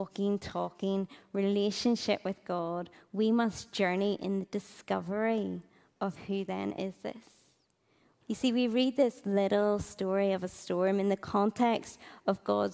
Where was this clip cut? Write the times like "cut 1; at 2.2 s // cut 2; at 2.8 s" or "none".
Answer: cut 1; at 8.2 s